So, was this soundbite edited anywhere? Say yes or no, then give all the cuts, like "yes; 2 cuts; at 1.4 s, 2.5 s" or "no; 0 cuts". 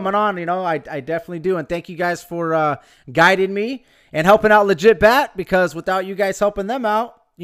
no; 0 cuts